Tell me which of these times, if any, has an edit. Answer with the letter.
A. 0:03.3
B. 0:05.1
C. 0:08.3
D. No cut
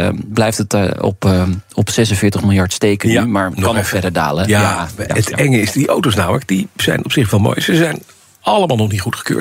B